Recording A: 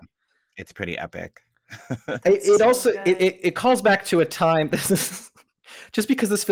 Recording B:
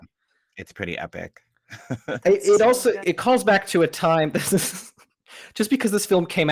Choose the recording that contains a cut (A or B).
B